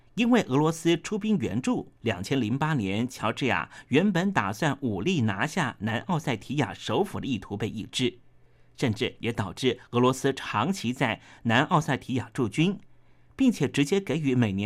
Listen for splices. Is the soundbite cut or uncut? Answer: cut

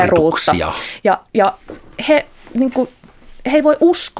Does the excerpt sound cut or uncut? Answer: uncut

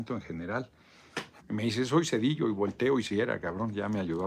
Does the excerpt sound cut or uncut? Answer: cut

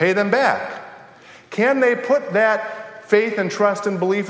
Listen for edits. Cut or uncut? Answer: uncut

